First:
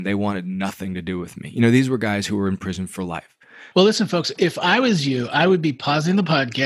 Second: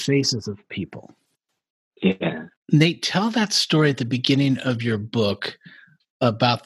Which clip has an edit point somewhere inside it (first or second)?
first